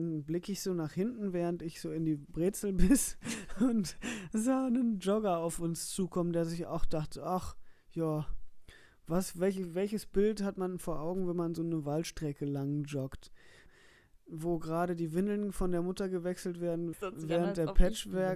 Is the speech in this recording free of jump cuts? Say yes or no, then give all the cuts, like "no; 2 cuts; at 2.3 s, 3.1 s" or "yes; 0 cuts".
no; 2 cuts; at 13.7 s, 16.9 s